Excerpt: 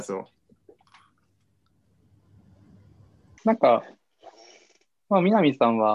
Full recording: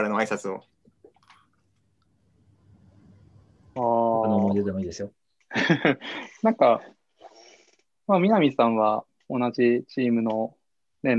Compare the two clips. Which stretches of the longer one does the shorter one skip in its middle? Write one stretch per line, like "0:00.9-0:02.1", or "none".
0:03.7-0:06.4

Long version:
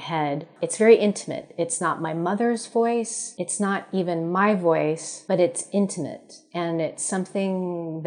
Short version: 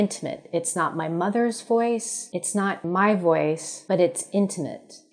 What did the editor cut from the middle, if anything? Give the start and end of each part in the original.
0:03.9-0:04.2

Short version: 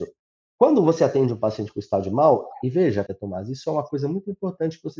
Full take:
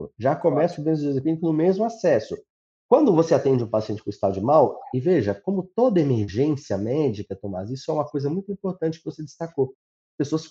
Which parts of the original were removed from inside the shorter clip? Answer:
0:05.4-0:07.3

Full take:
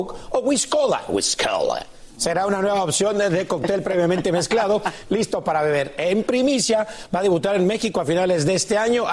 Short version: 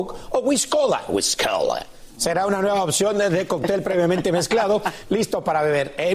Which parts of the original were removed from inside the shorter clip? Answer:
none

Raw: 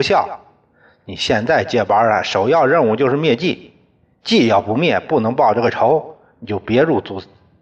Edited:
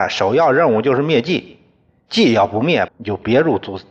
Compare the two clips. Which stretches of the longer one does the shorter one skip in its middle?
0:05.0-0:06.3

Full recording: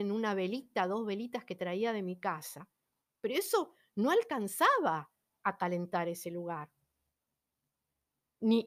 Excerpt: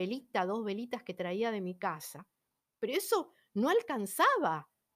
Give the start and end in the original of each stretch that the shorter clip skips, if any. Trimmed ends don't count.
none

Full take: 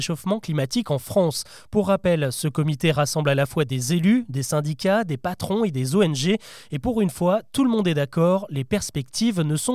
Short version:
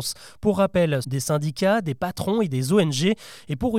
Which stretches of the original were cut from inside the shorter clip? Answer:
0:02.3-0:04.3

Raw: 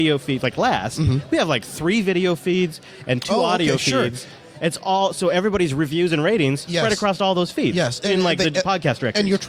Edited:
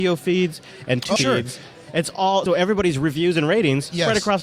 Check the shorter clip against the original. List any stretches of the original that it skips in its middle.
0:03.4-0:03.8
0:05.1-0:05.2

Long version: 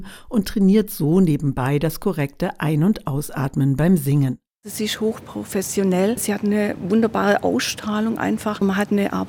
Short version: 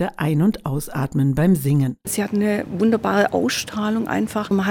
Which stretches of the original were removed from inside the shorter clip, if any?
0:04.5-0:06.2

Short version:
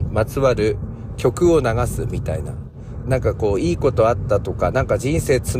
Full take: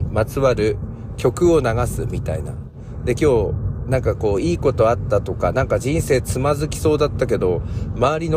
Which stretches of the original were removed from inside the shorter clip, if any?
0:03.0-0:03.8

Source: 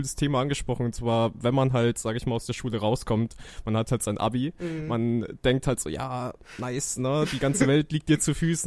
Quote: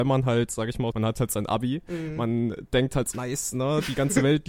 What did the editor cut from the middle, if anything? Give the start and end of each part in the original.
0:02.4-0:03.6
0:05.8-0:06.6

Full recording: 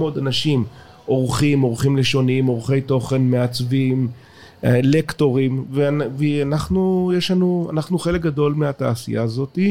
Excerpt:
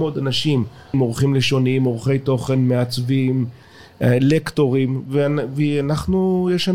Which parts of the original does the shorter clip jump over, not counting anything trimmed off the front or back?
0:00.9-0:01.6

